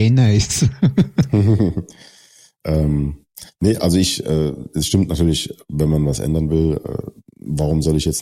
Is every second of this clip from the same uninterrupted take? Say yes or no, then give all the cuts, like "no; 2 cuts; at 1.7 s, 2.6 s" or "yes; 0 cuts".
yes; 0 cuts